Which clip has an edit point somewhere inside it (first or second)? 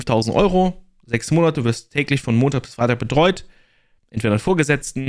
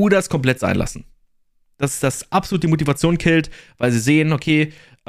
first